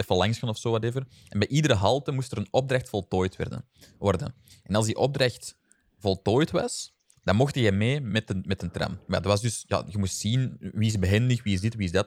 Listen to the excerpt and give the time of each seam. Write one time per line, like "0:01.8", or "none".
none